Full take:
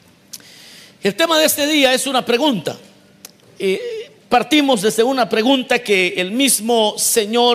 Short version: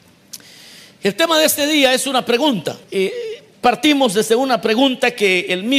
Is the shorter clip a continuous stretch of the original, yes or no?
no